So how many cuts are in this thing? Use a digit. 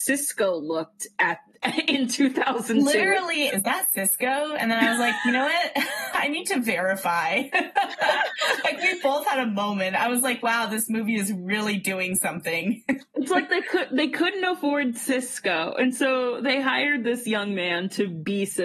1